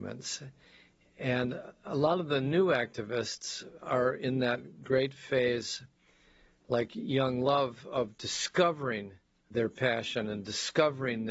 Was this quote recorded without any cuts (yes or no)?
yes